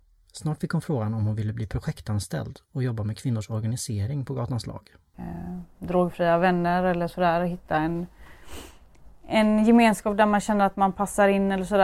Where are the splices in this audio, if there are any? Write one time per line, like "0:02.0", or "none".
0:05.1